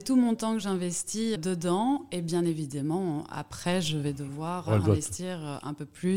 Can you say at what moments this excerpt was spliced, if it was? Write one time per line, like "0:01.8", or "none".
0:01.4